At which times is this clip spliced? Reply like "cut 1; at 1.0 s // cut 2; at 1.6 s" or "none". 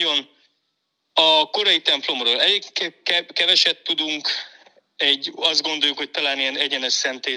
none